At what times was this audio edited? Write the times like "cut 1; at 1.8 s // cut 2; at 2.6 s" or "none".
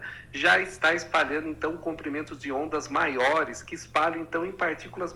none